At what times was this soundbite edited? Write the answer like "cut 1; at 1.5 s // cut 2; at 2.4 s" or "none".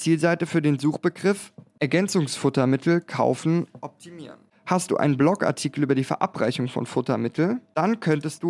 none